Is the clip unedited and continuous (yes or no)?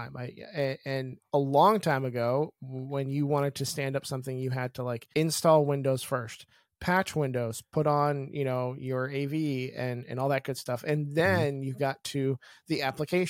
yes